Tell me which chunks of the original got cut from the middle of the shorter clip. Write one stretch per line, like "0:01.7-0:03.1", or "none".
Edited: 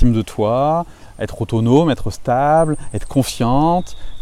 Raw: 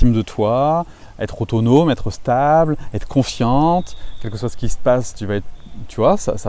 none